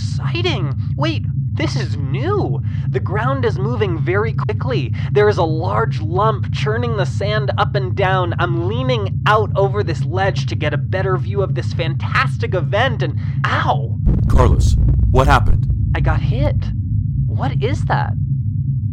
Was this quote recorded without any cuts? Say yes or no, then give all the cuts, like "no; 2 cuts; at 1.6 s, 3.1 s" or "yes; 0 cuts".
yes; 0 cuts